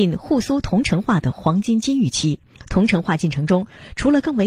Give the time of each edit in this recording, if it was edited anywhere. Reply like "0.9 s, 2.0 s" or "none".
none